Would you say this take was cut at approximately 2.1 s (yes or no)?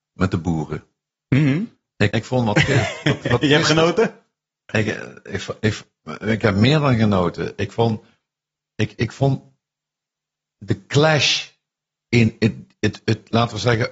yes